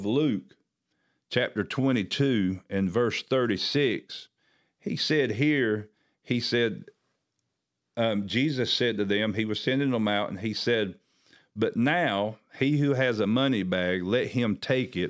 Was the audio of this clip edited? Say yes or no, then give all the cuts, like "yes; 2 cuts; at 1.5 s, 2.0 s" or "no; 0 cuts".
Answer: no; 0 cuts